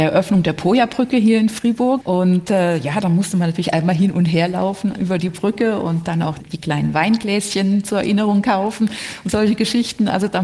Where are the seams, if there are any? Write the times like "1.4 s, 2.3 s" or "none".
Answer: 2.0 s, 6.4 s